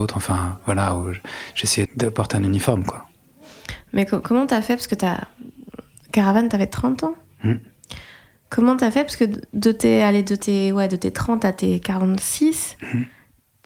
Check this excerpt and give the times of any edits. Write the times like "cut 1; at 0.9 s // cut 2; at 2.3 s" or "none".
cut 1; at 1.9 s